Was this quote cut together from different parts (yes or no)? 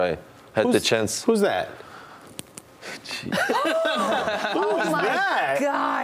no